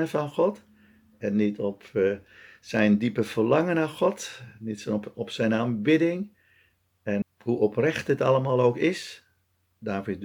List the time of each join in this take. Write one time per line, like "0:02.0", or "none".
0:07.2

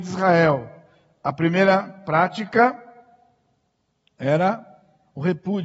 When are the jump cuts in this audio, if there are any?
none

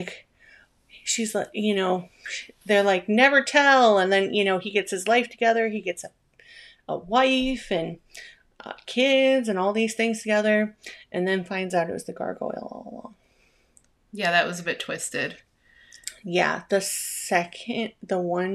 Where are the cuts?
none

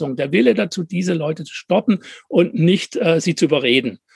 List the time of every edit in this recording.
none

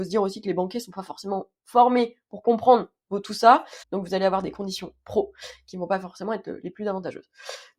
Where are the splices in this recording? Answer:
0:03.8

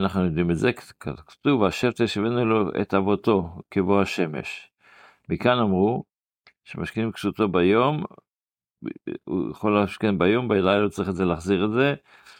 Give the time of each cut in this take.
none

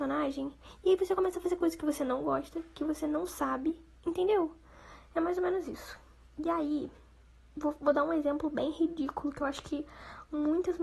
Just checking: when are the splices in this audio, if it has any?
none

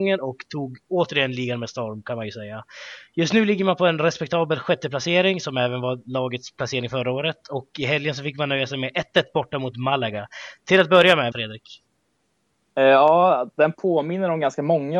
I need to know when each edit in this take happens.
0:11.3

